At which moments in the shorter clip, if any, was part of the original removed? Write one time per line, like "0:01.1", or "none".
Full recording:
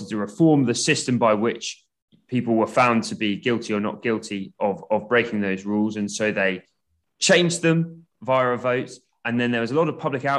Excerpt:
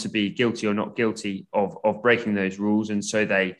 none